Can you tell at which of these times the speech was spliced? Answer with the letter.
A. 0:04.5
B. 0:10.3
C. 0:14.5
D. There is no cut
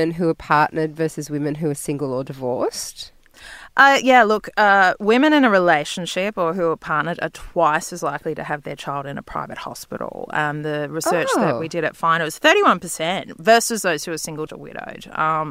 C